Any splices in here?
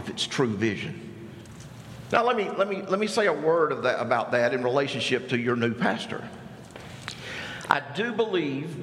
no; 0 cuts

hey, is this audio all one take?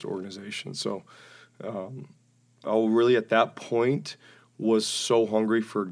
no; 1 cut; at 2.6 s

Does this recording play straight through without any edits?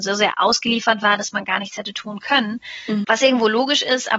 no; 1 cut; at 3.0 s

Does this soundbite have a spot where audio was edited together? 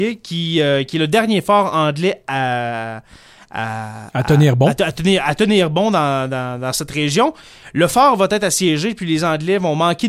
no; 0 cuts

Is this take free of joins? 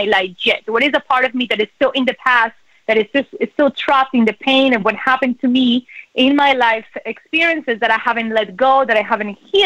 yes; 0 cuts

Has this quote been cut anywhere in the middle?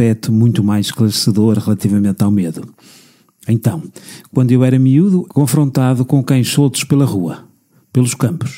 yes; 1 cut; at 5.3 s

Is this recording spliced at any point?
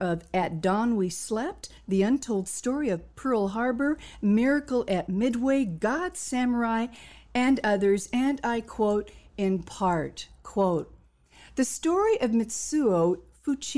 no; 0 cuts

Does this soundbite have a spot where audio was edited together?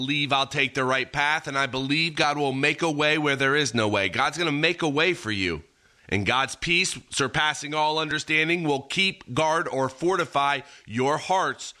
yes; 1 cut; at 6.0 s

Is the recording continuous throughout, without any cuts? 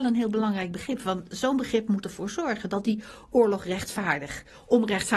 yes; 0 cuts

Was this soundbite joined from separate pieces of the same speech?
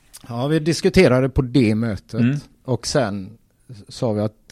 no; 0 cuts

